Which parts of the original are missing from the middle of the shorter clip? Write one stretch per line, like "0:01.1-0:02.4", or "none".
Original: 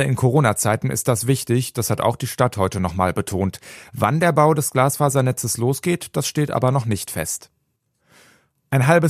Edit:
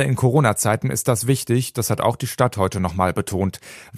none